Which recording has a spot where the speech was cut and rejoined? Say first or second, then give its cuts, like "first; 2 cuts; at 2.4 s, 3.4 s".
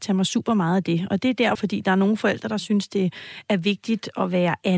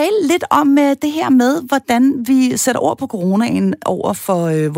first; 1 cut; at 1.6 s